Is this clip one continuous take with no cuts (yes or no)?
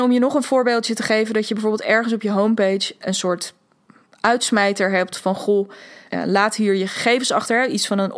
no